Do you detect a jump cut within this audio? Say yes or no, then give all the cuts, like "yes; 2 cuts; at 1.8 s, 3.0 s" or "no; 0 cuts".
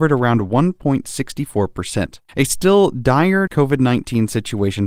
yes; 1 cut; at 2.3 s